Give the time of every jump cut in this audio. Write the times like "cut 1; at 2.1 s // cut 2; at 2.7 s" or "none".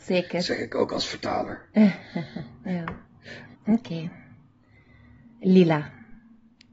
cut 1; at 3.5 s